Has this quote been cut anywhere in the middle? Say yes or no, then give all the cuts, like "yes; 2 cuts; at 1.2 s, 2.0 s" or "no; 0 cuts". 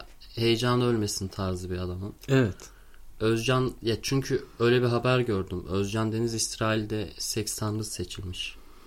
yes; 1 cut; at 3.1 s